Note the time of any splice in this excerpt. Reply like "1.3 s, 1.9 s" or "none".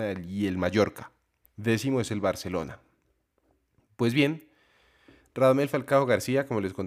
1.4 s